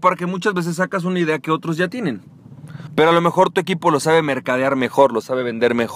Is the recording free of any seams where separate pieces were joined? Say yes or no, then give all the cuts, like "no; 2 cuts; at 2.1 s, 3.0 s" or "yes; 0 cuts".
no; 1 cut; at 2.9 s